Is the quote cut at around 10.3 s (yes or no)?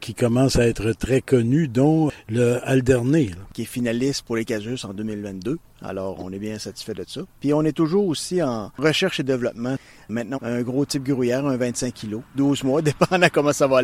yes